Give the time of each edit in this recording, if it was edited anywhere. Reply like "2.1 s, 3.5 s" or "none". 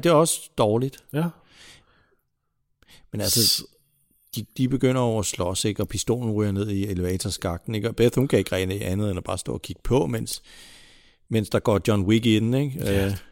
none